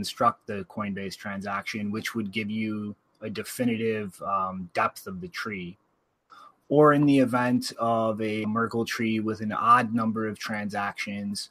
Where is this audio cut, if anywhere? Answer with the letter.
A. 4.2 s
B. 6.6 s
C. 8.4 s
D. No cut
C